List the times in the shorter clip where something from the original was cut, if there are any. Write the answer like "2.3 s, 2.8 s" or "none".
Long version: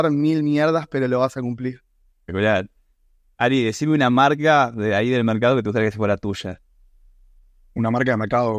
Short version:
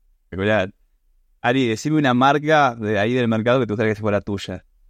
none